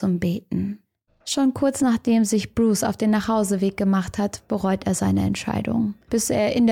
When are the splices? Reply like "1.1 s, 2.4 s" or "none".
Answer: 1.1 s